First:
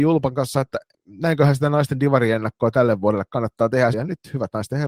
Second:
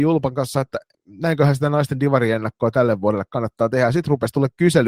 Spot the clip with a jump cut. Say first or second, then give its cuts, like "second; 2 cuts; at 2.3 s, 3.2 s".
first; 1 cut; at 3.9 s